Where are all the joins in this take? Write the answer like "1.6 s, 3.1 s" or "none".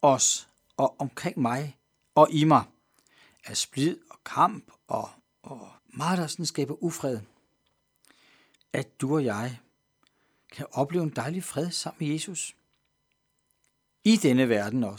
5.8 s, 8.6 s